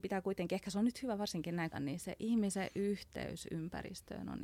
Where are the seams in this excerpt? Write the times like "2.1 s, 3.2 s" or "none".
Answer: 1.7 s